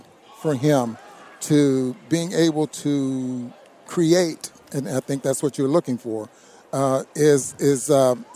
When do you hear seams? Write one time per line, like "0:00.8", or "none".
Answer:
none